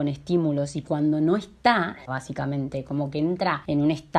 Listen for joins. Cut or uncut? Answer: cut